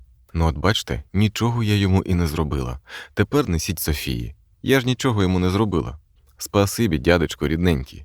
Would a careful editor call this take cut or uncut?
uncut